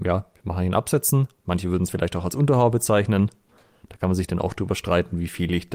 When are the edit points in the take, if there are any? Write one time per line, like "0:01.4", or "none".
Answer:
none